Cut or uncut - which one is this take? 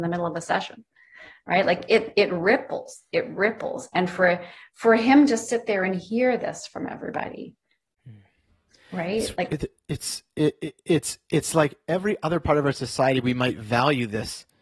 uncut